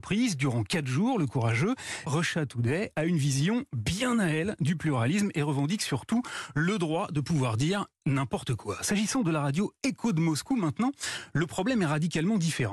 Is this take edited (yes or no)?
yes